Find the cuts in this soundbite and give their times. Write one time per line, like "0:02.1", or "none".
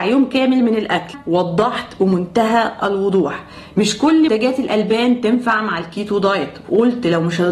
0:04.3

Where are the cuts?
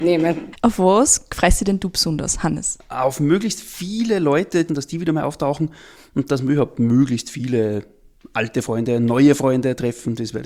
0:04.7

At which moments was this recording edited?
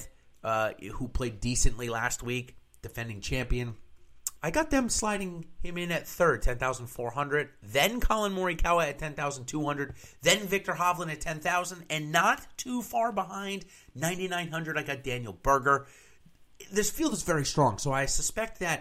0:04.4

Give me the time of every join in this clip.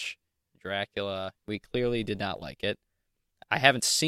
0:01.4

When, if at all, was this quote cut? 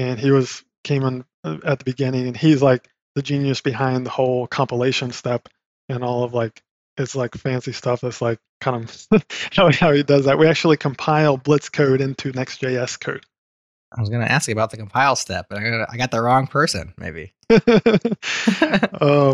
none

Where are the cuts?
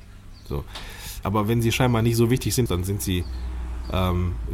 0:01.2
0:02.7

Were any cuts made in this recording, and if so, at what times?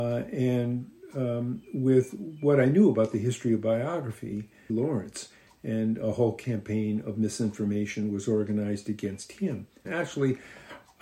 0:04.7
0:09.8

